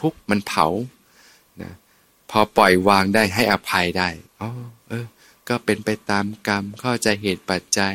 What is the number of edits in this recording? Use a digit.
1